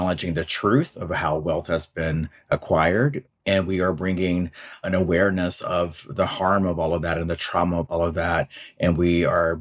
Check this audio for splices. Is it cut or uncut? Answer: cut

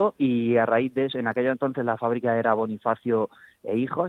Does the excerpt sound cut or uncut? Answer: uncut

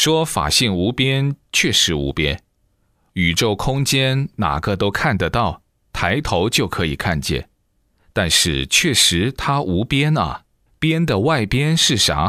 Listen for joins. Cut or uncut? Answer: cut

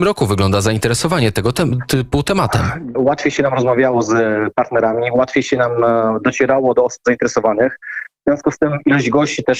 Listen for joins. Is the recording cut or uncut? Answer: cut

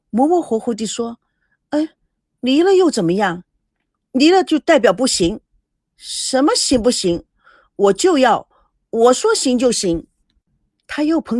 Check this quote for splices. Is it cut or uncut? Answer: uncut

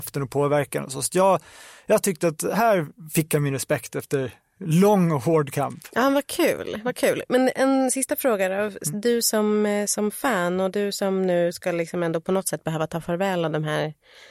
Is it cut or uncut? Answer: uncut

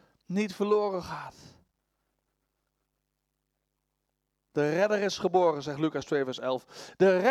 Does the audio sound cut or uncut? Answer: uncut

